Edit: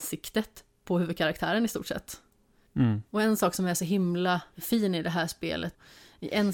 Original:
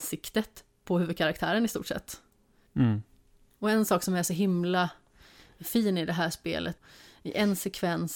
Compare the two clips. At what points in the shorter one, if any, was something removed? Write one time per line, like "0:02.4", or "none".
0:03.1
0:04.5